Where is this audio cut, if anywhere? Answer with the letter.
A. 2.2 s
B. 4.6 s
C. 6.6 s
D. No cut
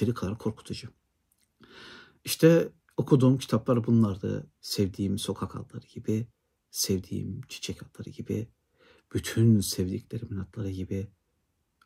B